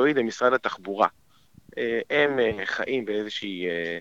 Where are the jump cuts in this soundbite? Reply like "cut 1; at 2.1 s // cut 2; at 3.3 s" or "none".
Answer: none